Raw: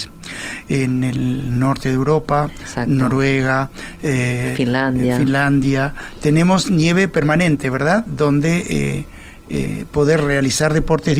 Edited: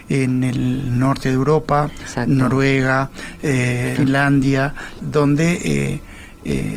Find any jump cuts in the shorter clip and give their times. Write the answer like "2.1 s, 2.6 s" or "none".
4.0 s, 5.0 s